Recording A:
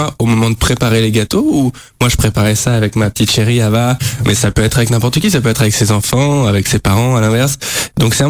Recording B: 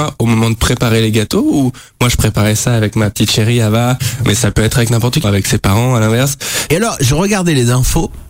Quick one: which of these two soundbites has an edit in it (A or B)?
B